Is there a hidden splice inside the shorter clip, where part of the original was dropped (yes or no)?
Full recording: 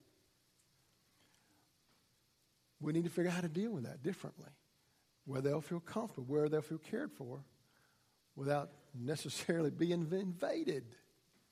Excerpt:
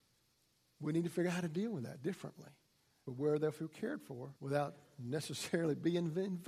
yes